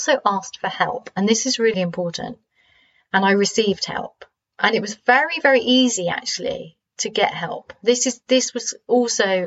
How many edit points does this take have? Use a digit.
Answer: 1